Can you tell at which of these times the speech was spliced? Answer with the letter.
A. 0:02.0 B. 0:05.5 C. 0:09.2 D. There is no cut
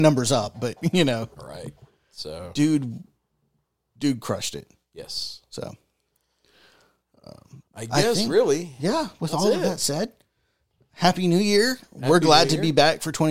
D